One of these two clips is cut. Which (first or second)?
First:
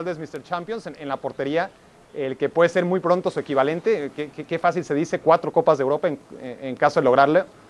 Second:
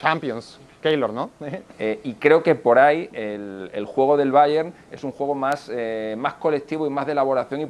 second